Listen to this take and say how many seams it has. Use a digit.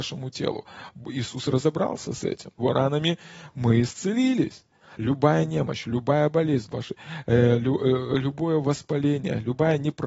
3